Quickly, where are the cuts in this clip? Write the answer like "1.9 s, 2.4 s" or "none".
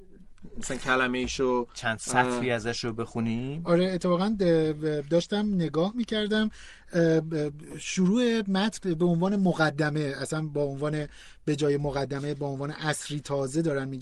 3.7 s